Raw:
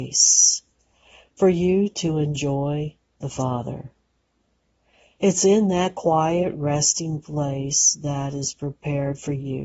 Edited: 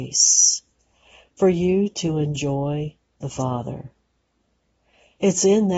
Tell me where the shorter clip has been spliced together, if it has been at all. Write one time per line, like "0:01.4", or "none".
none